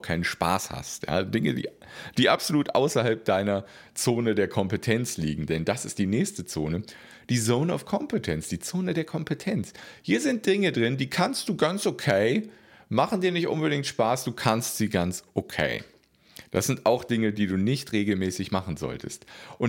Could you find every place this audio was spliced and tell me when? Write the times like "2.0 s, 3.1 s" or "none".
none